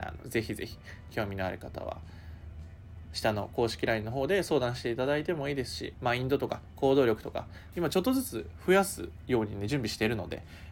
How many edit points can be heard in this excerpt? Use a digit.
2